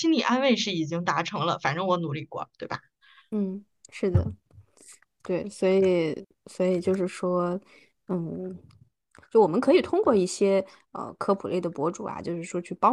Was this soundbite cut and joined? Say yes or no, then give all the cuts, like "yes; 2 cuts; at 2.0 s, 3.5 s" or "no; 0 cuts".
no; 0 cuts